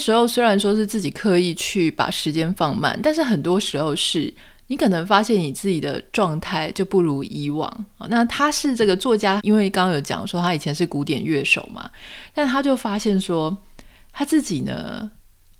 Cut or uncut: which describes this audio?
cut